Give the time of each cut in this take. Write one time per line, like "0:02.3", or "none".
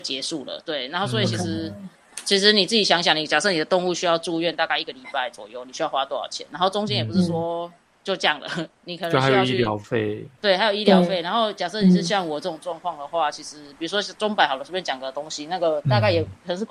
none